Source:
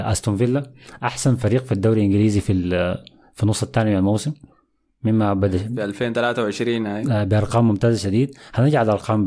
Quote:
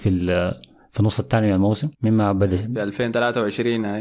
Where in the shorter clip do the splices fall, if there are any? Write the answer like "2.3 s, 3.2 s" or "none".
1.9 s